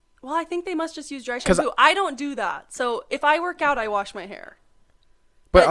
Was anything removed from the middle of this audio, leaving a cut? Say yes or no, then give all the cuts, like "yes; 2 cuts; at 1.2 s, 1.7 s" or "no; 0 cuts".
no; 0 cuts